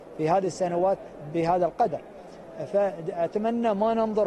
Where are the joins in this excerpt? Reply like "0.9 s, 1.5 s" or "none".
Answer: 1.3 s

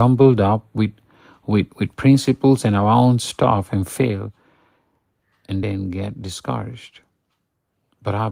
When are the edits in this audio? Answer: none

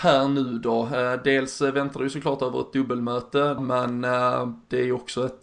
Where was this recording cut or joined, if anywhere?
3.6 s

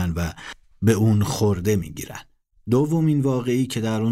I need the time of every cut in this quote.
none

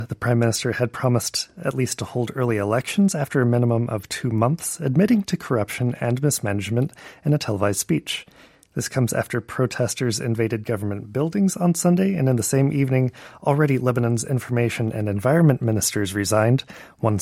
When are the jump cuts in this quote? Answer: none

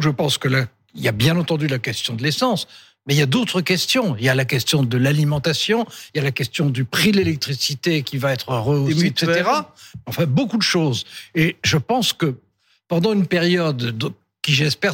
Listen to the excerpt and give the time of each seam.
6.1 s

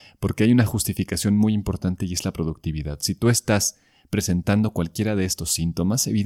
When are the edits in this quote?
none

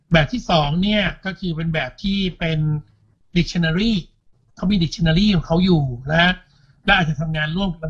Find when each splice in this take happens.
none

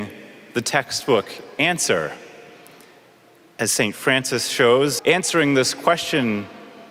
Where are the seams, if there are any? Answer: 5.0 s

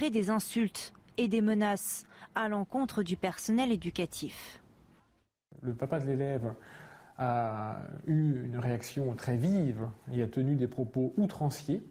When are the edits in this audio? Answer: none

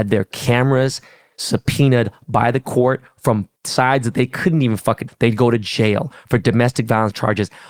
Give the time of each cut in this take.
3.6 s, 5.1 s

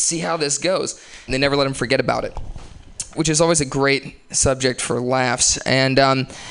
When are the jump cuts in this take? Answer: 1.3 s, 3.1 s

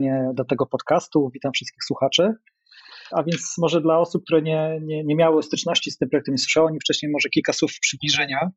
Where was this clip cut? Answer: 3.1 s

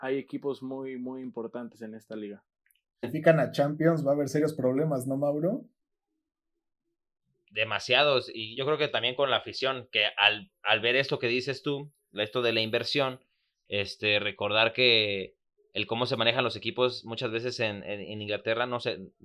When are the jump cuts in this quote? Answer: 3.0 s

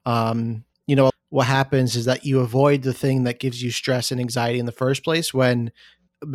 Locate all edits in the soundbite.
1.1 s

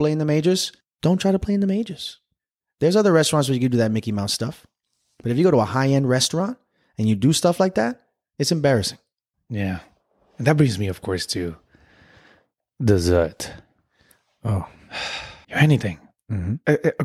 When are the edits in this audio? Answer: 9.3 s, 15.4 s

